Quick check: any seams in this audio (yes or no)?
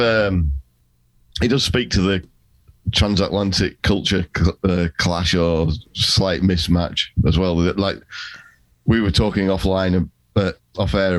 no